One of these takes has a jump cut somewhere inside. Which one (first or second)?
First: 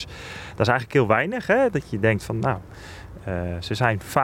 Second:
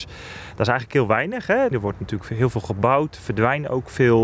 second